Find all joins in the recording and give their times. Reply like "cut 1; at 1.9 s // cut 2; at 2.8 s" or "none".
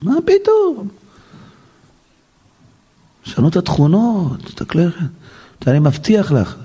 none